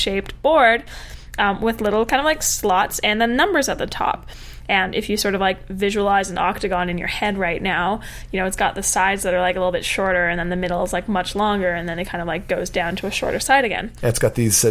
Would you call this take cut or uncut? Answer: uncut